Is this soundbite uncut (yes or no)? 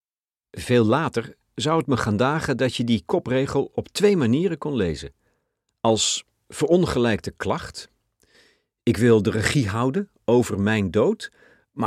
yes